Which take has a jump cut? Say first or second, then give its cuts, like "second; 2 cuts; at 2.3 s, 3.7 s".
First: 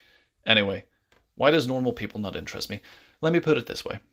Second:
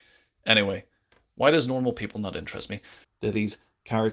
second; 1 cut; at 3.0 s